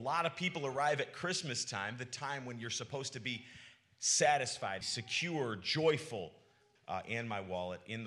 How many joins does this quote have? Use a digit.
2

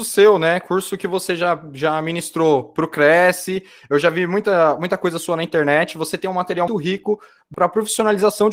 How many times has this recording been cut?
1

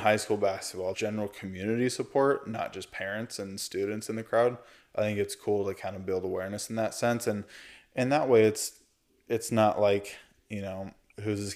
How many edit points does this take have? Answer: 1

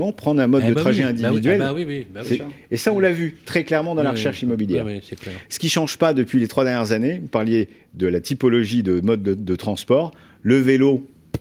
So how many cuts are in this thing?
0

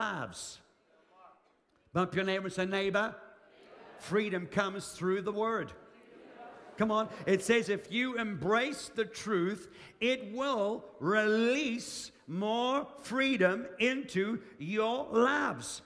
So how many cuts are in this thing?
0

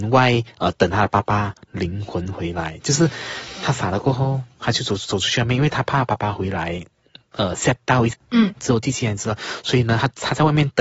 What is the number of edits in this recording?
1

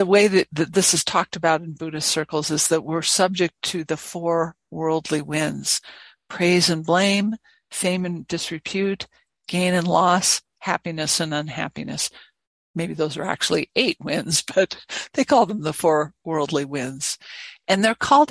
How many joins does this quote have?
0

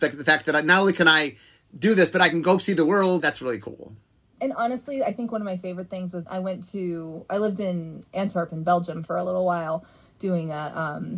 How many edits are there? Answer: 2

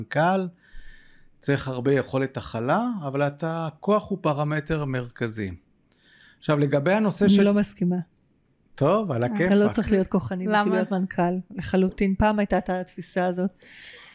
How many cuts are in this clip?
0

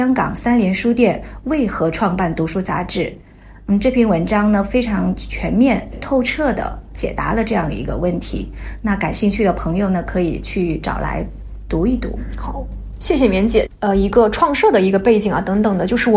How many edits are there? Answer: 1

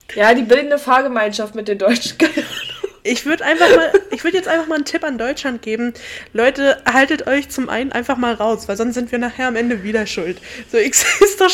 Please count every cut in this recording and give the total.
0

